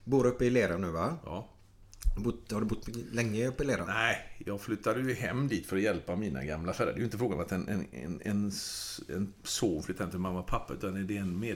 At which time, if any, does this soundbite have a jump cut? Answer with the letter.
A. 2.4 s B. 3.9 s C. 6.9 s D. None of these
D